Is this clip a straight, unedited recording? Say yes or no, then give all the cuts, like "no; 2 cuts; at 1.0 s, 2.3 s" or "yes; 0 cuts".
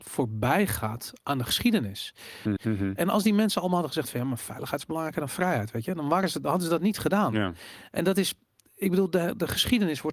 no; 1 cut; at 2.6 s